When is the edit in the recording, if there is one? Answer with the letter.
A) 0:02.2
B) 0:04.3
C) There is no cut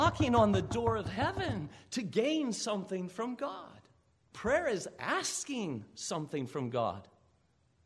B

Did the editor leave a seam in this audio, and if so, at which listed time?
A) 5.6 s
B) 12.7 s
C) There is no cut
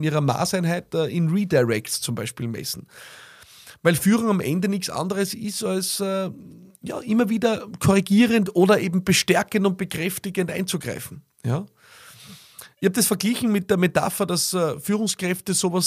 B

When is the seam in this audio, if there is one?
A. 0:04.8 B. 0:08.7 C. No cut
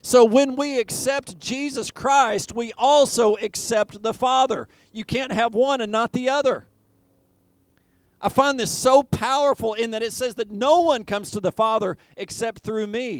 C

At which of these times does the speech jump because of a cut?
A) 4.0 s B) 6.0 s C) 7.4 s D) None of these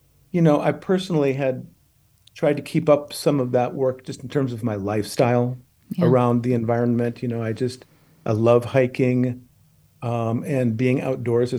D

